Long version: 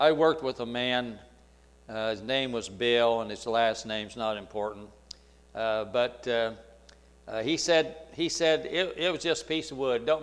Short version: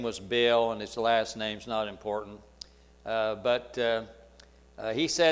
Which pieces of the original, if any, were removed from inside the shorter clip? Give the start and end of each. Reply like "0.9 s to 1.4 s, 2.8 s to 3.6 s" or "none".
none